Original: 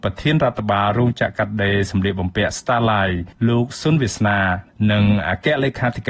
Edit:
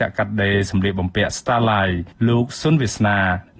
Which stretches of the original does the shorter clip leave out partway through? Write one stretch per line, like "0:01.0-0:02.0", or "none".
none